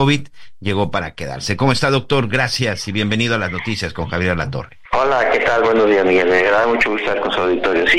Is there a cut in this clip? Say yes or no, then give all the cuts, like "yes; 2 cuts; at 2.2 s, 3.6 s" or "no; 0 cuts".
yes; 1 cut; at 4.9 s